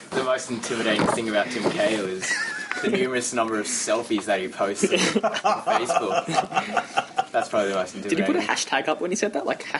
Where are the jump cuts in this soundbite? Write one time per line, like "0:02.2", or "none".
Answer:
none